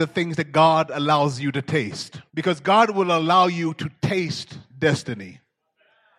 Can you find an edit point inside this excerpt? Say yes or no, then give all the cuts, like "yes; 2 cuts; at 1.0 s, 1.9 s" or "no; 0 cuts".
yes; 1 cut; at 2.3 s